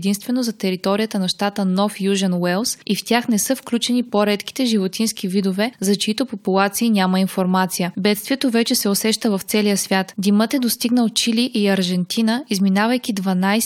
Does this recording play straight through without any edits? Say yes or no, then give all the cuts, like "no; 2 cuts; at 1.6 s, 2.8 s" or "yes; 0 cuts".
no; 1 cut; at 7.9 s